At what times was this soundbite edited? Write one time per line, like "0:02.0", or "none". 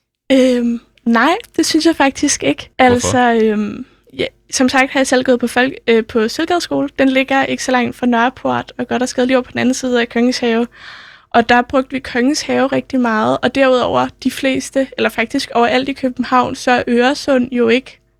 0:02.7